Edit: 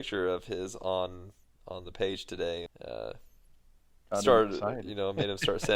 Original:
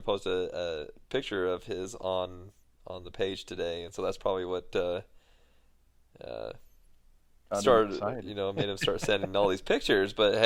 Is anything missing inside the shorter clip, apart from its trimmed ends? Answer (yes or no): yes